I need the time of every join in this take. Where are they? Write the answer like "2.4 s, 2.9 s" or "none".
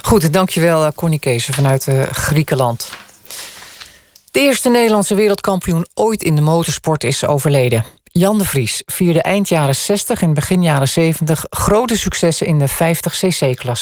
none